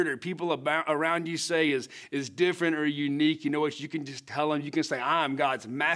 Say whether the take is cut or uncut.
uncut